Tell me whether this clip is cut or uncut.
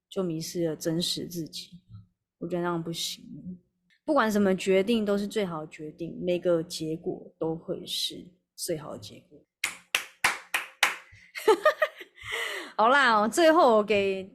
uncut